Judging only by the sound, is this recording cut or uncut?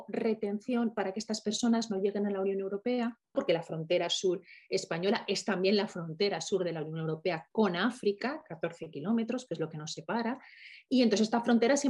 cut